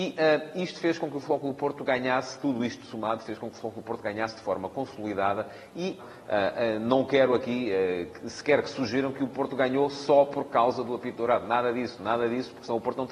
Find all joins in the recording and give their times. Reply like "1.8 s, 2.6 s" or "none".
6.0 s